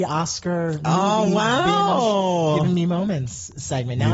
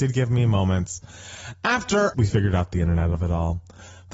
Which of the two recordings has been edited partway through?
second; 1 cut; at 2.1 s

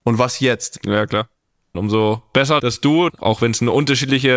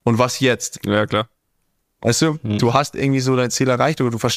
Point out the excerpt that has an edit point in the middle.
first; 2 cuts; at 1.7 s, 3.1 s

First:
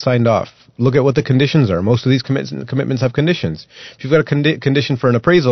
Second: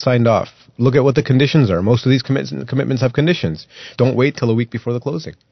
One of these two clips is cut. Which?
second; 1 cut; at 4.0 s

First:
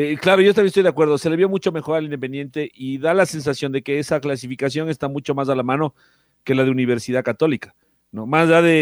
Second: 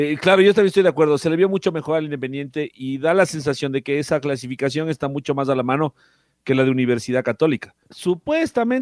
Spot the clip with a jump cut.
second; 1 cut; at 7.9 s

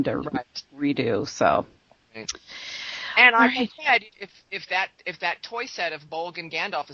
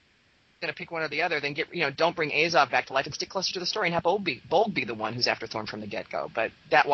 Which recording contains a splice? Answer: first; 1 cut; at 4.1 s

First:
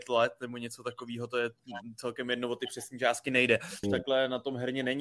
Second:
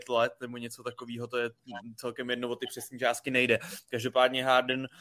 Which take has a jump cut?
first; 1 cut; at 3.8 s

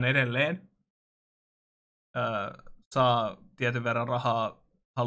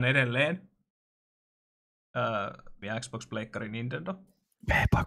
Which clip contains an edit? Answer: second; 1 cut; at 2.8 s

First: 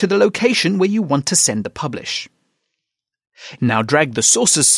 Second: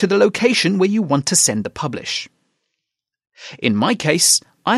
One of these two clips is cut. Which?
first; 1 cut; at 3.6 s

